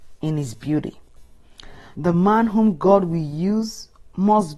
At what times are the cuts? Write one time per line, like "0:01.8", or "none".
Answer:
0:01.9